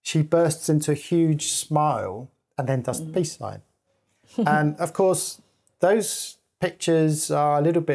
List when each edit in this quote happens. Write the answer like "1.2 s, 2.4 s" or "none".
none